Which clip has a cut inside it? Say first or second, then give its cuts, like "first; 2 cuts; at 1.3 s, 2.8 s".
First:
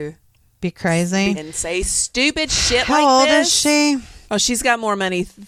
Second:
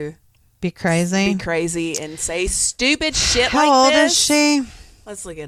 first; 2 cuts; at 1.3 s, 4.3 s